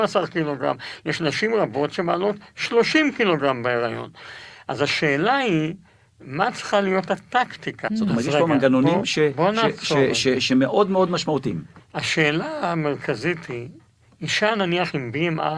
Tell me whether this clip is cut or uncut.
cut